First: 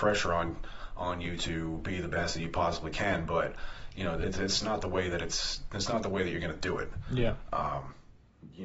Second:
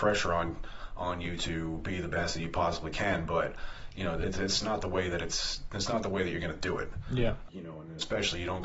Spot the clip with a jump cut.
second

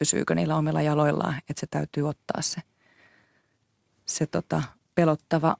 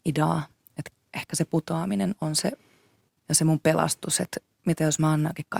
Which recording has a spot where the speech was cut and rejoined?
second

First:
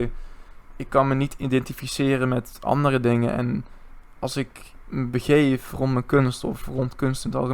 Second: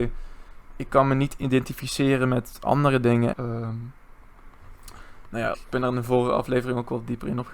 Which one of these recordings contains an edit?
second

